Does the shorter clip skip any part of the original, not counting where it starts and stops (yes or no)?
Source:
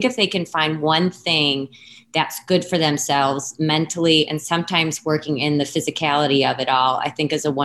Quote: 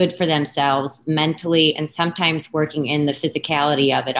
no